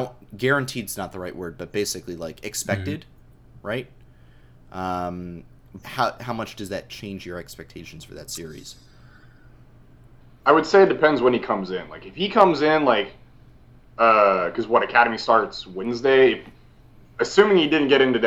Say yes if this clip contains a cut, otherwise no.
yes